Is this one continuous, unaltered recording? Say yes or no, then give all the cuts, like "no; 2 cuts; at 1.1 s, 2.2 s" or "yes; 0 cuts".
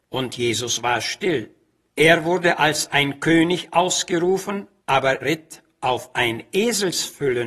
no; 1 cut; at 5.2 s